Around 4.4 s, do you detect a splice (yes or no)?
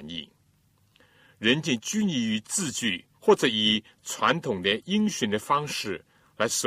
no